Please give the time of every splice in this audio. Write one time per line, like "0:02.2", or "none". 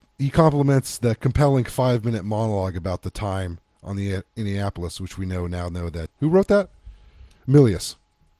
0:06.1